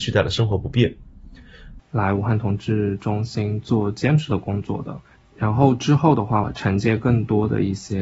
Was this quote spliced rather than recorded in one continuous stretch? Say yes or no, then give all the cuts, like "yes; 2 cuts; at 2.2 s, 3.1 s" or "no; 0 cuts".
yes; 2 cuts; at 1.8 s, 6.4 s